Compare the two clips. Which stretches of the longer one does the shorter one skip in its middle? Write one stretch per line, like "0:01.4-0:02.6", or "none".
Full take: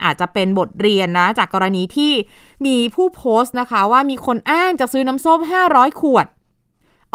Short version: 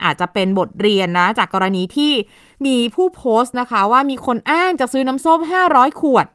none